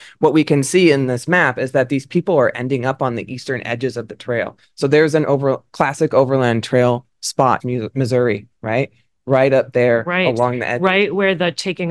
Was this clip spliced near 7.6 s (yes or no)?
yes